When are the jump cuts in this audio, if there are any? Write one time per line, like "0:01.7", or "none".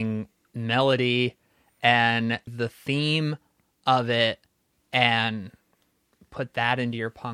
0:02.5